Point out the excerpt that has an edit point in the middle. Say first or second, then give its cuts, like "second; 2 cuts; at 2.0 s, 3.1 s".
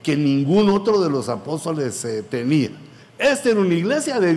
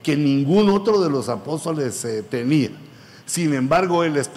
first; 1 cut; at 3.0 s